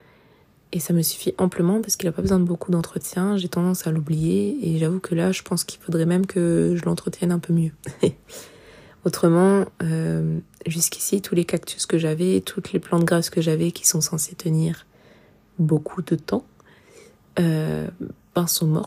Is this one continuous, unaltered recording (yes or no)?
yes